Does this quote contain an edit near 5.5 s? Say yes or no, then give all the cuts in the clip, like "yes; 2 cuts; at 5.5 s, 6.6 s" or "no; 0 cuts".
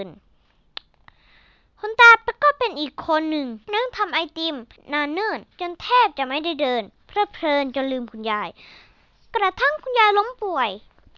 yes; 2 cuts; at 3.6 s, 5.5 s